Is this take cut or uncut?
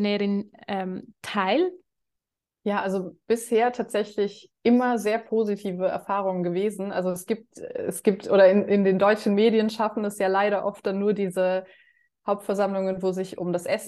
cut